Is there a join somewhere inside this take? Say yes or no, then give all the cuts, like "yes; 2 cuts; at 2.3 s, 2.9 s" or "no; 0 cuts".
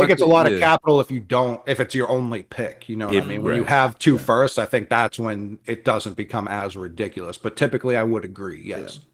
no; 0 cuts